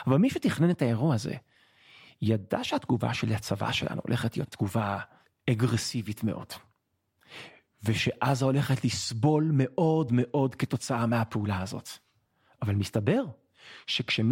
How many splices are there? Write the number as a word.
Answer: one